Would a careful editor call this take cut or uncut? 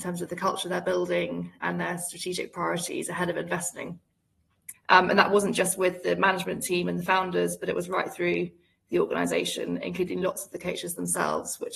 cut